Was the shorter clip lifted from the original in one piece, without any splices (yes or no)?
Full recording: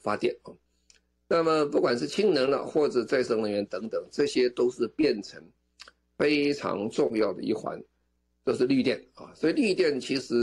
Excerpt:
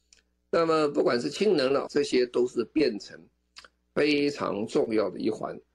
no